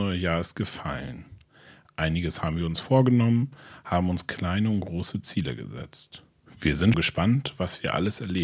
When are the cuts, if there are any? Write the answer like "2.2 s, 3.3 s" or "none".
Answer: 6.9 s